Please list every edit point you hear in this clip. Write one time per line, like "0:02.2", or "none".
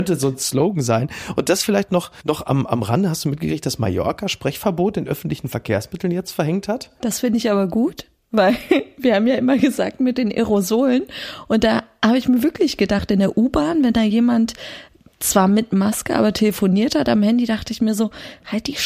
none